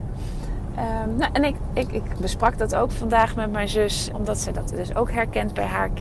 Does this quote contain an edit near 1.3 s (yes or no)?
no